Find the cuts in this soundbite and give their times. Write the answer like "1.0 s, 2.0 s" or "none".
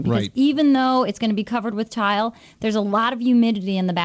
none